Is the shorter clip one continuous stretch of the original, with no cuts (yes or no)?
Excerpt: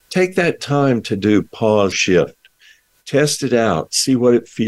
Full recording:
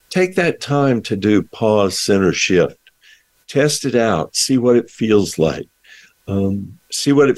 no